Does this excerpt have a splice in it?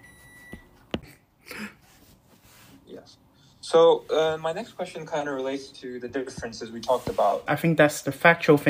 yes; 1 cut; at 7.5 s

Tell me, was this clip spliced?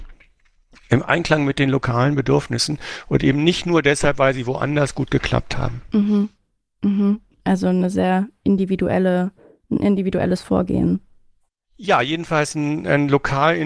no; 0 cuts

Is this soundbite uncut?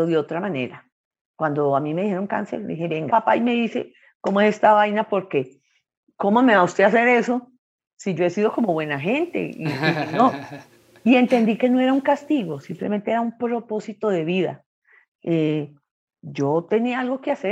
no; 1 cut; at 3.1 s

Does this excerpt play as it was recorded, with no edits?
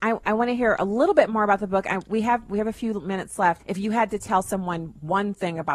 no; 1 cut; at 3.6 s

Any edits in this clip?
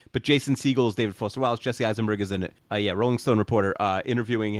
no; 0 cuts

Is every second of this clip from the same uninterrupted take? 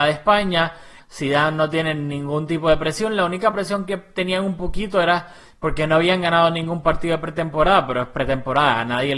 no; 1 cut; at 1.0 s

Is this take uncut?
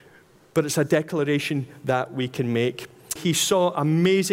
no; 1 cut; at 3.2 s

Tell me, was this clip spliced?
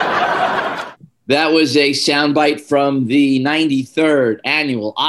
no; 0 cuts

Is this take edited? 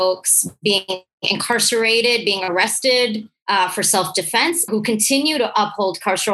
yes; 1 cut; at 4.7 s

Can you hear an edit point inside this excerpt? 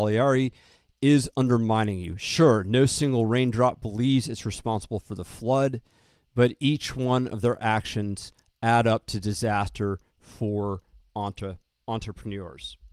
no; 0 cuts

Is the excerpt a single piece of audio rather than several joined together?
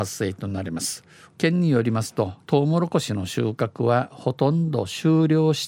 no; 2 cuts; at 1.3 s, 2.4 s

